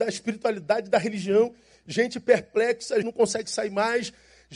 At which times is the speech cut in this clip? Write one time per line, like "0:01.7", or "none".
0:03.0